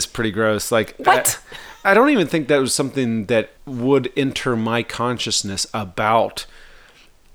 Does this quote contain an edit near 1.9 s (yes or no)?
yes